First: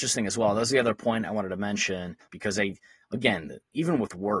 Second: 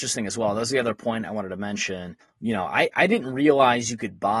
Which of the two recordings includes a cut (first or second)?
first